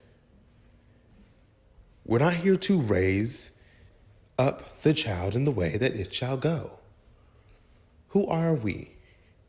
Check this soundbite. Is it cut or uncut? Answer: uncut